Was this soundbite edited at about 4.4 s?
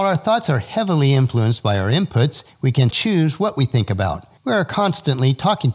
no; 1 cut; at 2.9 s

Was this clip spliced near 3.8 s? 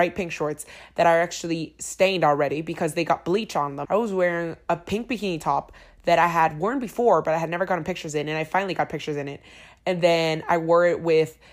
yes; 1 cut; at 3.8 s

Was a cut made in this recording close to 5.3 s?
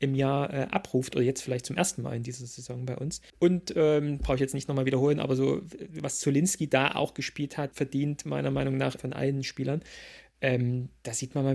no; 3 cuts; at 3.3 s, 7.7 s, 9.0 s

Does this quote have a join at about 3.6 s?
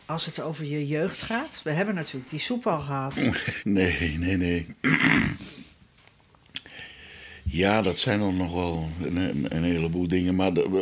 yes; 1 cut; at 3.6 s

